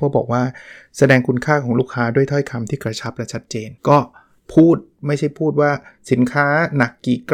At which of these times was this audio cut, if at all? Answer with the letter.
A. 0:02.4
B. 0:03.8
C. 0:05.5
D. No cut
B